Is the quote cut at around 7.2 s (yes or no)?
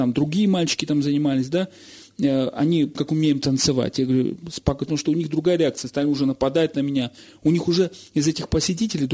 no